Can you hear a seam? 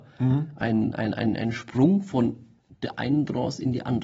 no; 0 cuts

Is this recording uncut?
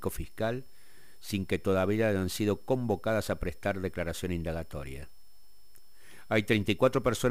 yes; 0 cuts

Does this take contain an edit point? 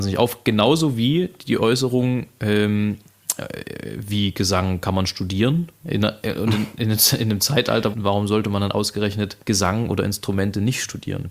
yes; 3 cuts; at 5.8 s, 7.9 s, 9.4 s

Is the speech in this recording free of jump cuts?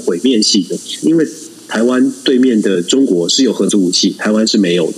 no; 1 cut; at 1.0 s

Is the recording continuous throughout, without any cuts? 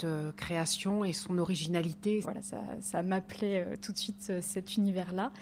no; 1 cut; at 2.2 s

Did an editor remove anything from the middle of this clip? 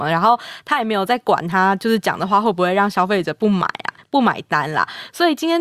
no; 0 cuts

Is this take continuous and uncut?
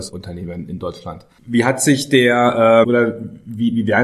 no; 2 cuts; at 1.4 s, 2.8 s

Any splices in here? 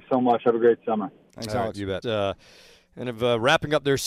yes; 1 cut; at 2.0 s

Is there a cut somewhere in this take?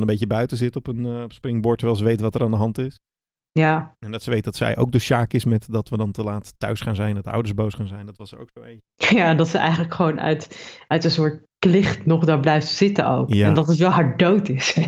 no; 0 cuts

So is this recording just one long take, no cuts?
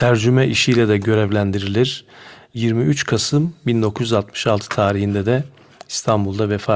yes; 0 cuts

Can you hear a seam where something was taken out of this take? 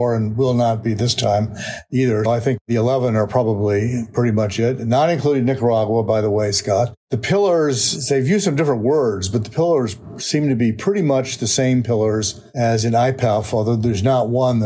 yes; 1 cut; at 2.3 s

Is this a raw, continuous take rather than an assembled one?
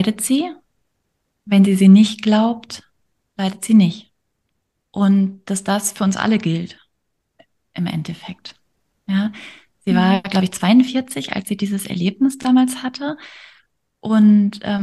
yes; 0 cuts

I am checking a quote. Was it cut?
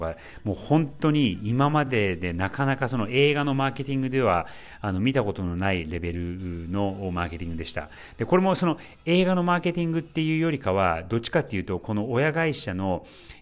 no; 0 cuts

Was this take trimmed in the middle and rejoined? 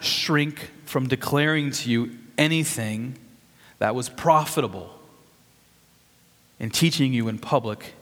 yes; 1 cut; at 6.5 s

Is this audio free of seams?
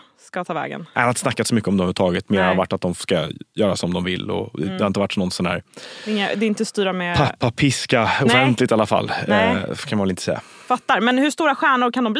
yes; 0 cuts

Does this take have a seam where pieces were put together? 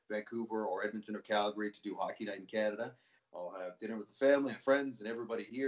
yes; 1 cut; at 3.2 s

